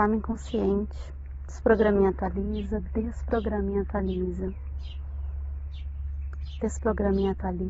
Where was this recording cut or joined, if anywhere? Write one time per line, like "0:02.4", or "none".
none